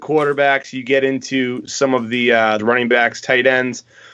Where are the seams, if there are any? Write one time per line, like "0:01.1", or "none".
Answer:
0:02.6